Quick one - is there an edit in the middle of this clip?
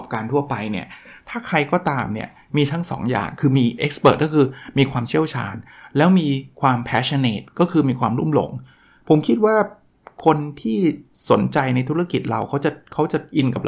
yes; 1 cut; at 3.8 s

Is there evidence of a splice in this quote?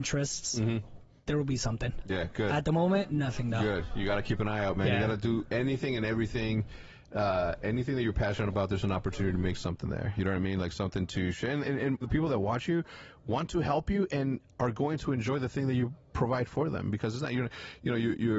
yes; 1 cut; at 12.0 s

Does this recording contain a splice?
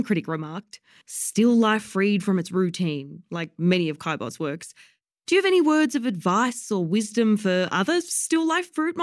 no; 0 cuts

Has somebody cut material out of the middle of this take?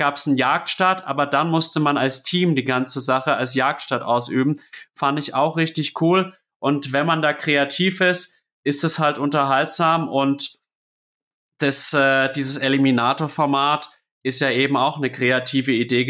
no; 0 cuts

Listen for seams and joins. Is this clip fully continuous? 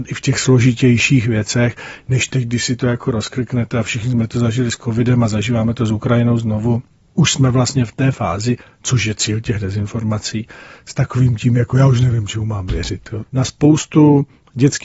no; 1 cut; at 13.3 s

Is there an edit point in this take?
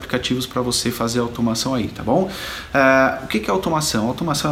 no; 0 cuts

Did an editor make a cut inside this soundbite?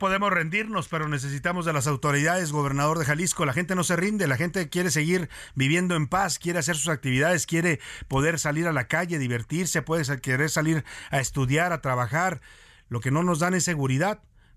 no; 0 cuts

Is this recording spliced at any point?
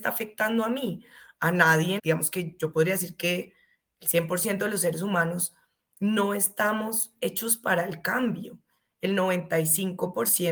yes; 1 cut; at 2.0 s

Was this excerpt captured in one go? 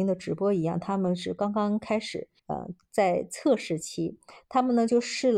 no; 1 cut; at 2.4 s

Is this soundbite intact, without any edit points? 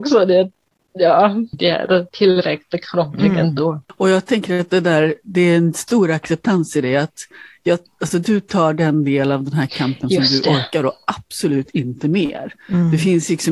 no; 1 cut; at 1.5 s

